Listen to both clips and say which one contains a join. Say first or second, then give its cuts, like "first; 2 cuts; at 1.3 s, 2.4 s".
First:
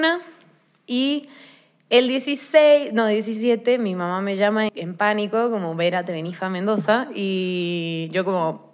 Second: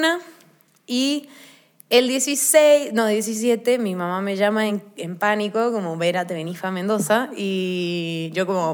first; 1 cut; at 4.7 s